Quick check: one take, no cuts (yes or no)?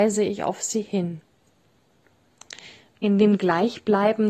no